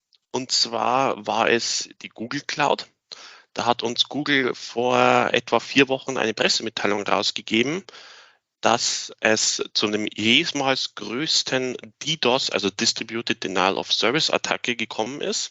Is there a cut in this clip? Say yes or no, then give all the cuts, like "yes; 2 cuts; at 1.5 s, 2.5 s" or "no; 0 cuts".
no; 0 cuts